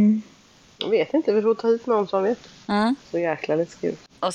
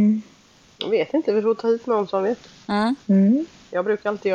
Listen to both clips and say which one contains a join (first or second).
first